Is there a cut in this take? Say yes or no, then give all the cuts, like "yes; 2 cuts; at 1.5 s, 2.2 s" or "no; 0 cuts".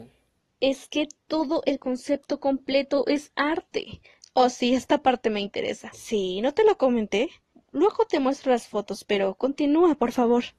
yes; 2 cuts; at 4.2 s, 5.9 s